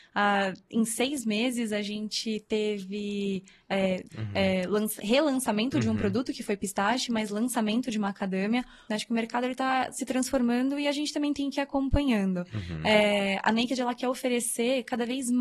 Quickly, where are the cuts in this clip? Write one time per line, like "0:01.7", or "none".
0:04.1
0:08.9